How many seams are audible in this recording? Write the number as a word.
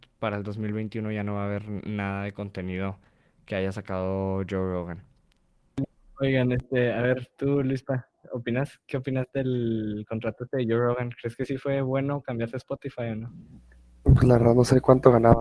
zero